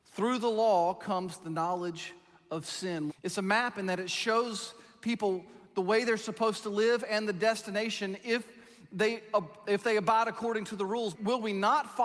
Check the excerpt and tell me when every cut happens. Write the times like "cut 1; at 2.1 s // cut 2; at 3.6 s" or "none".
cut 1; at 3.1 s // cut 2; at 11.1 s

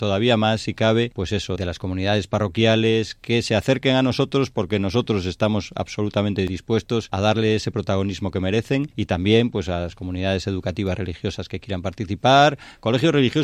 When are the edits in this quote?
cut 1; at 1.5 s // cut 2; at 7.1 s

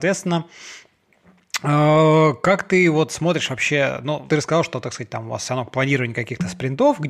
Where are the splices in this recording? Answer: cut 1; at 4.3 s

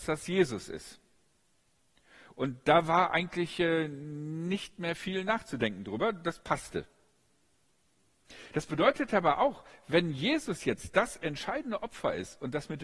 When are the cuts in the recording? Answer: none

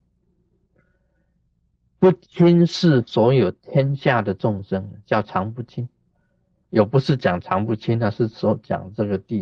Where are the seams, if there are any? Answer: cut 1; at 6.6 s

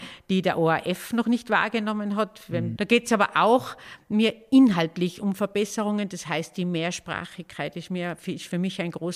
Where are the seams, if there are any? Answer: cut 1; at 2.7 s

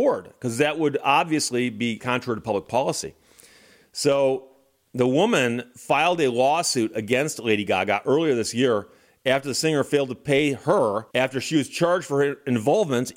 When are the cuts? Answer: cut 1; at 2.0 s // cut 2; at 11.1 s

